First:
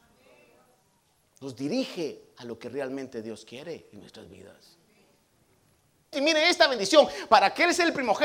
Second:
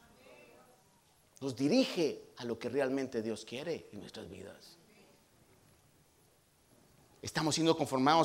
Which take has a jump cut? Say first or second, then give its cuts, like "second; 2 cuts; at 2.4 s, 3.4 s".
first; 1 cut; at 6.1 s